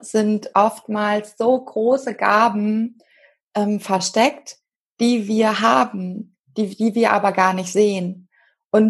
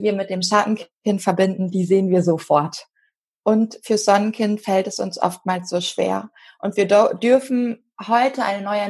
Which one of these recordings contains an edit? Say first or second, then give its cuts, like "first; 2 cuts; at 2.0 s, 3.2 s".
second; 1 cut; at 3.3 s